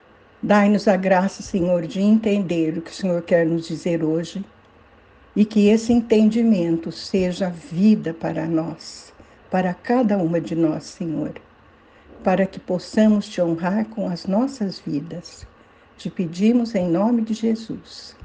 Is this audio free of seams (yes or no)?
yes